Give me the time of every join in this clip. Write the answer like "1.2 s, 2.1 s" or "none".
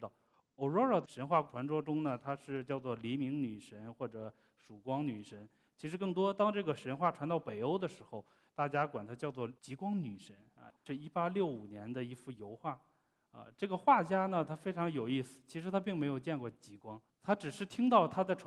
9.6 s, 10.8 s